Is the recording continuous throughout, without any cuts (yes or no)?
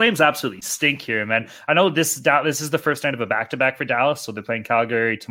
yes